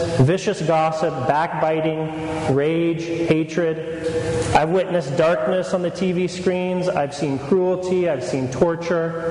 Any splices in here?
yes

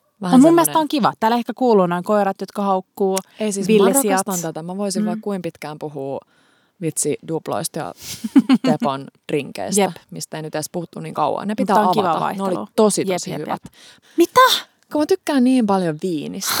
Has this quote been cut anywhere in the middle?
yes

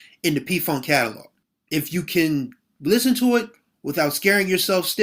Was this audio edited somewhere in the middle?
no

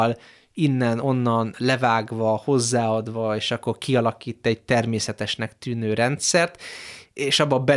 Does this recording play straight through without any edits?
yes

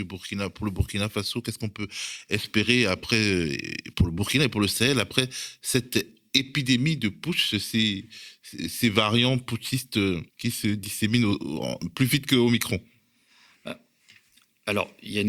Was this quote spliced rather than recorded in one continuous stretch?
yes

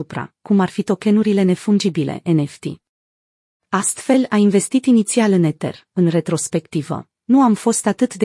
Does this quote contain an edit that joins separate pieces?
yes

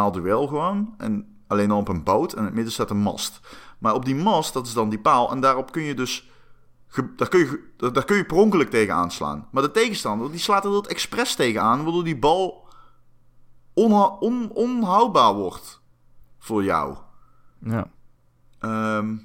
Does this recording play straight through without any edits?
yes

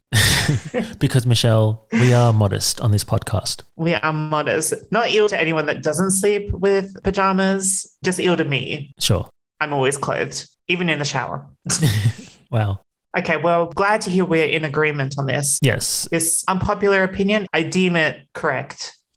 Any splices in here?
no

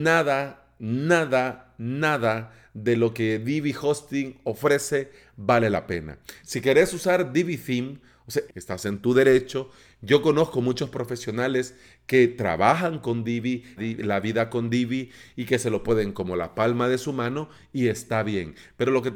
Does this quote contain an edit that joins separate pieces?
yes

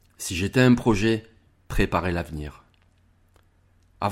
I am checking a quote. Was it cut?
no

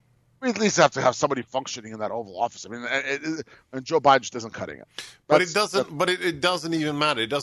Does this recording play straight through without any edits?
yes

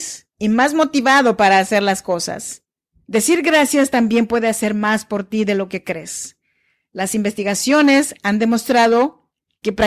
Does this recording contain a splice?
yes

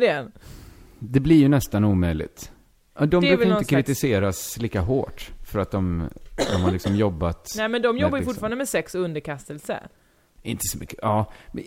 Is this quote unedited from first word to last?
no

